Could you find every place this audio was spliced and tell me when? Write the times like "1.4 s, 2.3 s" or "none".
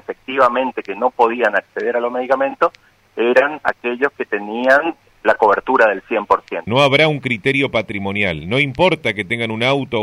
5.1 s, 6.7 s